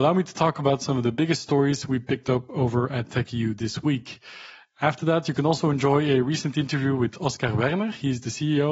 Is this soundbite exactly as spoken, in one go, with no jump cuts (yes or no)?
yes